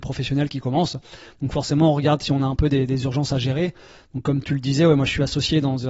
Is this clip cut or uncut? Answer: uncut